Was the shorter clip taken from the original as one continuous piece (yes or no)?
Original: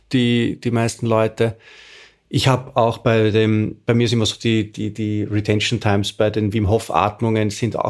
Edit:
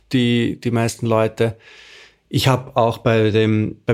yes